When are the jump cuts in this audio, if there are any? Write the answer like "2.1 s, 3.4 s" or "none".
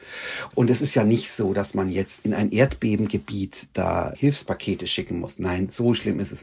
none